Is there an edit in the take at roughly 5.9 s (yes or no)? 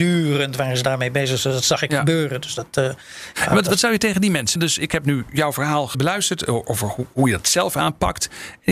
yes